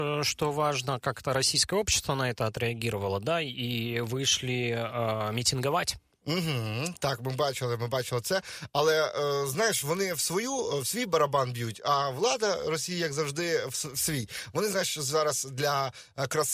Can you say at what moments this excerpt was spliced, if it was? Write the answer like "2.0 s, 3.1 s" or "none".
none